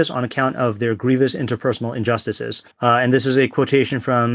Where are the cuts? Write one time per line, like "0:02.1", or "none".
0:02.7